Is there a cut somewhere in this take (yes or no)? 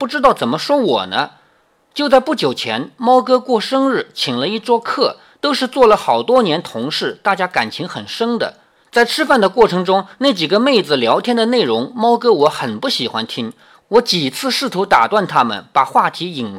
no